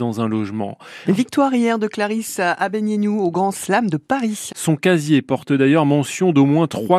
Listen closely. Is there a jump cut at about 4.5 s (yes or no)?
yes